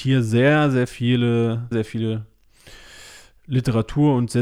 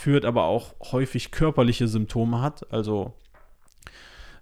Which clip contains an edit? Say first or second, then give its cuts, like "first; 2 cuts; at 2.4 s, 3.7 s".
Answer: first; 1 cut; at 1.7 s